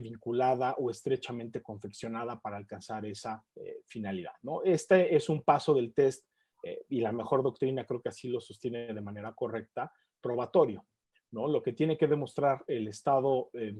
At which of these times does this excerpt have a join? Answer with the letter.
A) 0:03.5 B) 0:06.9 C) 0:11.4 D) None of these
A